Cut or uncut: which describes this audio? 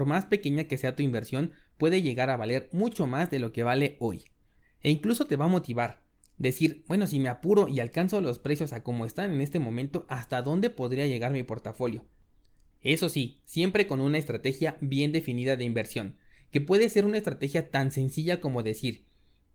uncut